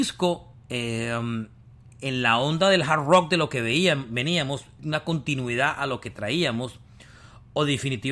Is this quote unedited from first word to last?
no; 1 cut; at 4.8 s

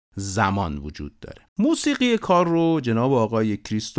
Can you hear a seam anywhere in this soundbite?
yes; 1 cut; at 1.5 s

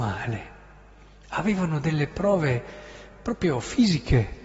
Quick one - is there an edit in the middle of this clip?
no; 0 cuts

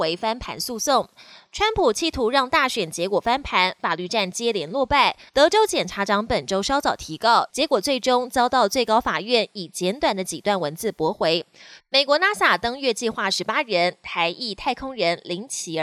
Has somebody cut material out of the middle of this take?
yes; 3 cuts; at 5.3 s, 7.5 s, 11.8 s

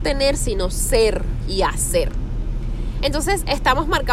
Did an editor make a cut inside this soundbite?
no; 0 cuts

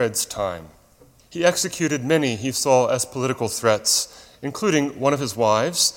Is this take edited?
yes; 1 cut; at 1.2 s

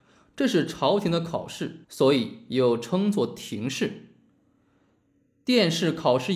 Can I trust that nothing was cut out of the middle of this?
yes; 0 cuts

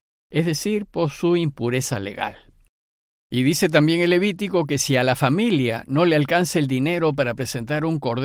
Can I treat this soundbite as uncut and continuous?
yes; 0 cuts

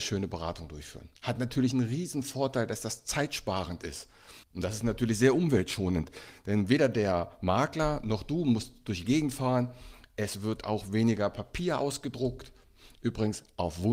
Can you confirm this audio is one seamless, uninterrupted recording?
no; 2 cuts; at 1.2 s, 4.4 s

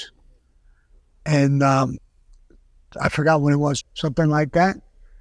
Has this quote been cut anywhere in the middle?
yes; 1 cut; at 3.8 s

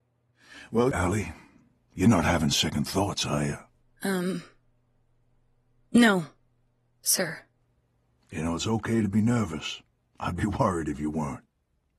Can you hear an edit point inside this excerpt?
yes; 1 cut; at 0.9 s

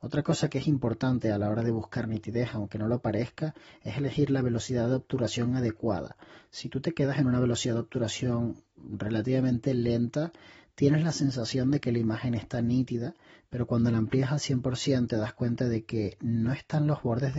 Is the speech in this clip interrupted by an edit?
no; 0 cuts

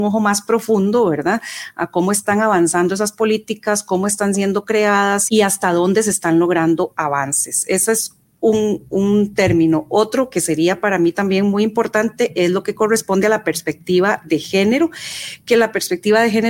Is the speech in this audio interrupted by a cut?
yes; 1 cut; at 5.3 s

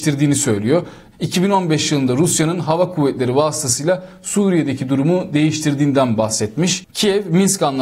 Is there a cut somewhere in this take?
yes; 2 cuts; at 1.1 s, 6.9 s

